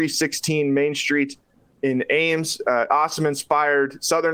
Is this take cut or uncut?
uncut